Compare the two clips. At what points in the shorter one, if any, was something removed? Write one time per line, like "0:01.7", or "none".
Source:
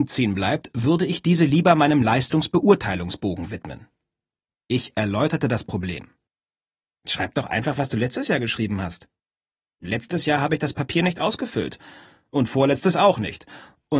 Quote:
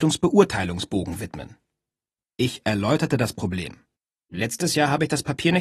0:04.1